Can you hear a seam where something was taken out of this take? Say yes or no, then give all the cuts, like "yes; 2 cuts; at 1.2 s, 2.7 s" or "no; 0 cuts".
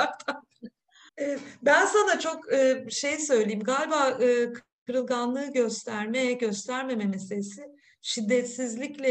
yes; 1 cut; at 1.1 s